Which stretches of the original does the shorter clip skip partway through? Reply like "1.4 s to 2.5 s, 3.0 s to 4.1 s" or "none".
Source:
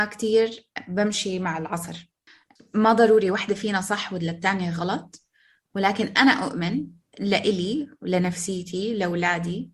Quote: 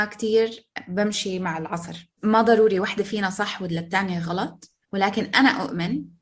2.2 s to 2.7 s, 5.3 s to 5.6 s